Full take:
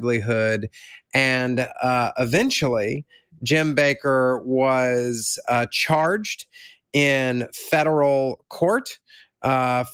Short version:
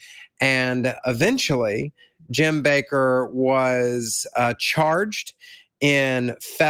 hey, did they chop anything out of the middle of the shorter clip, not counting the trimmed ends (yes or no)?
yes